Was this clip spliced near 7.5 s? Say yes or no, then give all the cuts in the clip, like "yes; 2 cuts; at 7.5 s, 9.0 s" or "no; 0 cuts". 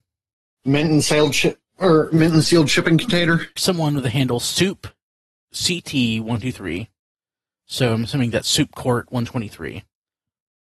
no; 1 cut; at 3.6 s